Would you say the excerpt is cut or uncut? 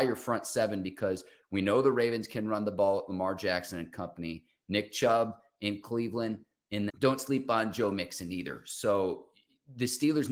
cut